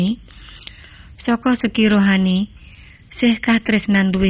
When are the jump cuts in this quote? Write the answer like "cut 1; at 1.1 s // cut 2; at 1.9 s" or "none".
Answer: none